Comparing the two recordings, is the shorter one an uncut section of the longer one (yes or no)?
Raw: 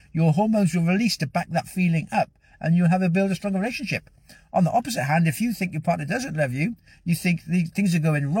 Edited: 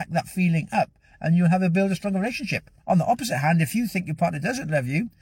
no